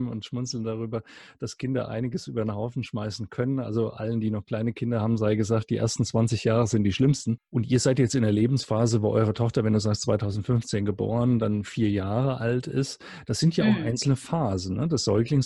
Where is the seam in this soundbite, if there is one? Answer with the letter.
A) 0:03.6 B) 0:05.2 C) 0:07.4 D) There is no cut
C